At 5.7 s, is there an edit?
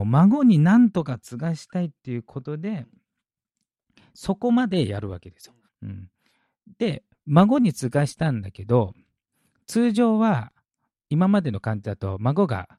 yes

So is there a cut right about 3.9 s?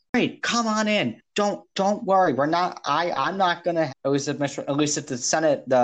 yes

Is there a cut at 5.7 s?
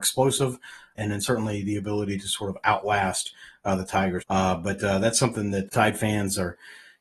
yes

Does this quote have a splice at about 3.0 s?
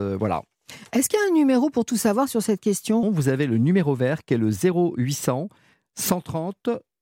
yes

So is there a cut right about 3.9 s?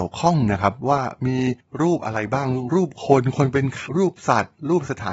yes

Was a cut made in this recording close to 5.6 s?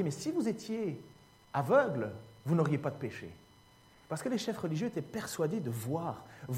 no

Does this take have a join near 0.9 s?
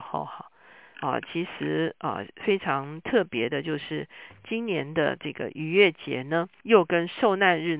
yes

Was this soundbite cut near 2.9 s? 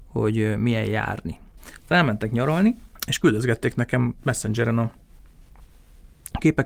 yes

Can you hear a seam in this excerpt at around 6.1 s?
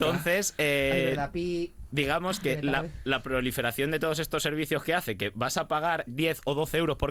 yes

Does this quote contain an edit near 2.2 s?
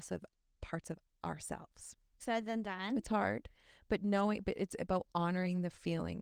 yes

